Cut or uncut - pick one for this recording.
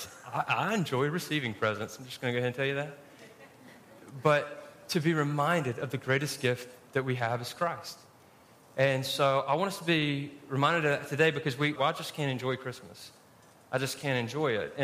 cut